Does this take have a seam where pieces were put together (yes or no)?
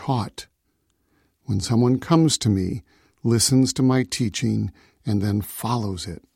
no